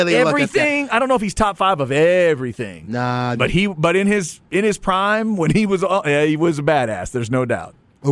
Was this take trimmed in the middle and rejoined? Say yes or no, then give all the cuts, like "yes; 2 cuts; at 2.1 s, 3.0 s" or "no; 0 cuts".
no; 0 cuts